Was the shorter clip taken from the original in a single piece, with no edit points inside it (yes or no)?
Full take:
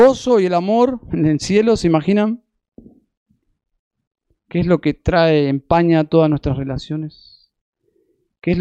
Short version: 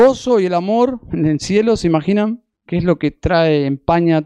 no